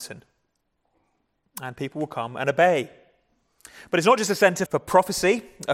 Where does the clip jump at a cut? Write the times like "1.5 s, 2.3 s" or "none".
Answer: 4.7 s